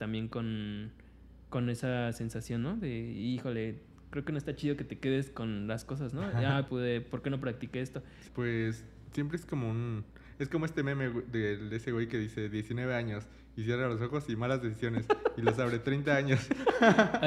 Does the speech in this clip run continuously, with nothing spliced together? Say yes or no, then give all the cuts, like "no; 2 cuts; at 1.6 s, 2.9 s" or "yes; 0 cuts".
no; 2 cuts; at 6.7 s, 8.3 s